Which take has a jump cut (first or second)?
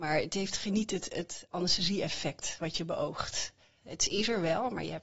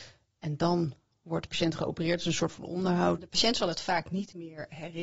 second